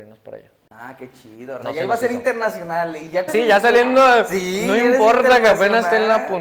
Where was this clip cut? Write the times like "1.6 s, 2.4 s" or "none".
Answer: 1.6 s, 3.3 s